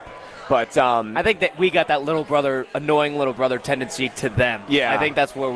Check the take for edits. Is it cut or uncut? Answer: uncut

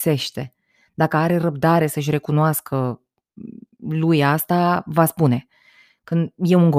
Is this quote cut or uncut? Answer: uncut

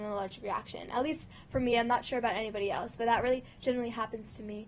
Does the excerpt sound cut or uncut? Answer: uncut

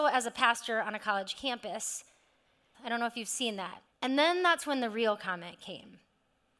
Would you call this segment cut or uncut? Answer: cut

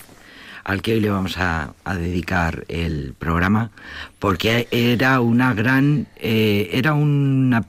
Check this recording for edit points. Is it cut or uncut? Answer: uncut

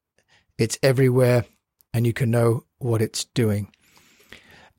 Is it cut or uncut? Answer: uncut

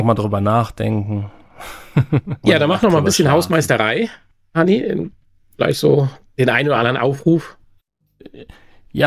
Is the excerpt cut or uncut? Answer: uncut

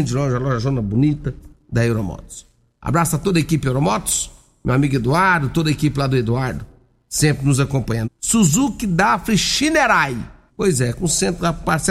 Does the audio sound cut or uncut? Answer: cut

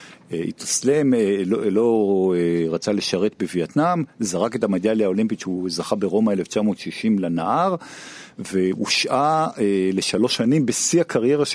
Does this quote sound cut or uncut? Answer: uncut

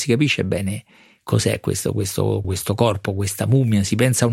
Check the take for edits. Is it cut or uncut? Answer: cut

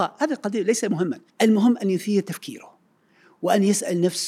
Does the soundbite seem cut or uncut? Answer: cut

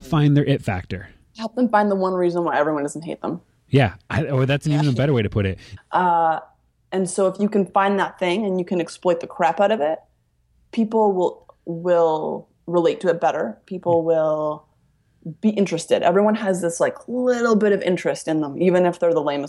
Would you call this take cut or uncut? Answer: cut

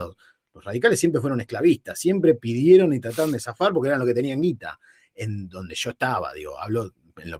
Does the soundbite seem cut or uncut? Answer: uncut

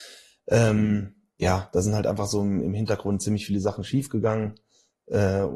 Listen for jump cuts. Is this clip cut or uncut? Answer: uncut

